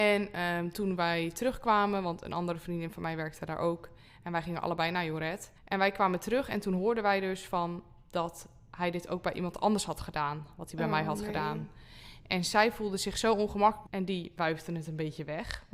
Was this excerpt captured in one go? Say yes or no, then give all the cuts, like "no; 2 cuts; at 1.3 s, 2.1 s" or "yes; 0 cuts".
no; 2 cuts; at 5.6 s, 13.9 s